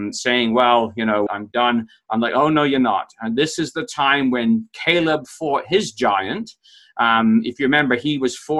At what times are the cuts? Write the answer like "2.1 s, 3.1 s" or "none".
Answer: 1.3 s